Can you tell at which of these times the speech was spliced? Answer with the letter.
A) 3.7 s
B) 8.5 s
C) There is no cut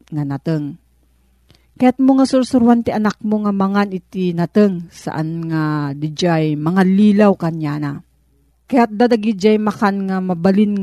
B